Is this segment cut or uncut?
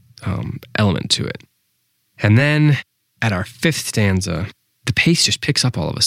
uncut